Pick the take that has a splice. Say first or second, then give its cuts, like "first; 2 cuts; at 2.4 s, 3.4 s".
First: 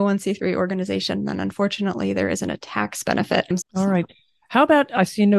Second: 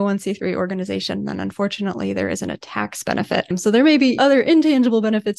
first; 1 cut; at 3.6 s